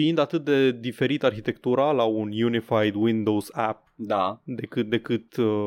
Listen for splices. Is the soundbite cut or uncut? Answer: uncut